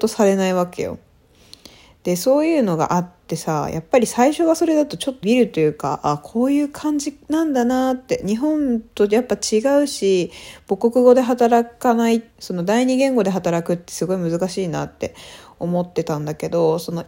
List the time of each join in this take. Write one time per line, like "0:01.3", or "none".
0:05.2
0:12.3